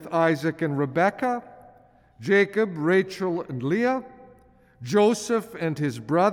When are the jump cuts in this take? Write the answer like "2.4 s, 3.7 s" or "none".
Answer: none